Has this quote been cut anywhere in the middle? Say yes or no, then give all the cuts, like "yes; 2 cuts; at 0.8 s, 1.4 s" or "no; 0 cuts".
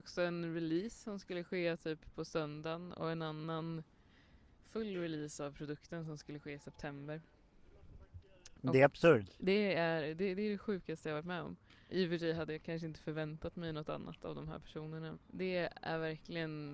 yes; 3 cuts; at 8.5 s, 11.9 s, 15.1 s